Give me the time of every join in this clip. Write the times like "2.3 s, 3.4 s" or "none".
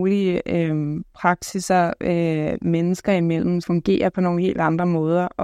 3.6 s